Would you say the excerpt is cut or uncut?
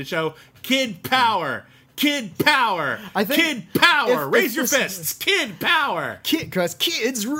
uncut